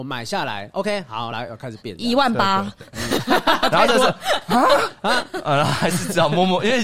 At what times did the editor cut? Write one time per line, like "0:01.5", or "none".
none